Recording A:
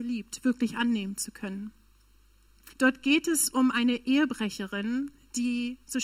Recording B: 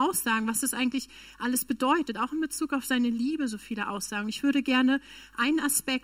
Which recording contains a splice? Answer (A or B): A